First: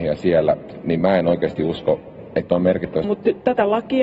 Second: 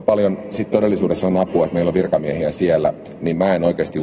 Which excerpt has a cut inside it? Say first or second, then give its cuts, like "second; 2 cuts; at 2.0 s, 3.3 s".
first; 1 cut; at 3.0 s